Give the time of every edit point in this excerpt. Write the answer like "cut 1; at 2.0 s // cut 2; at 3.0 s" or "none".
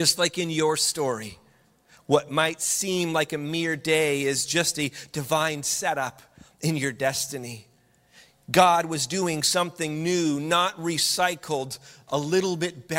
none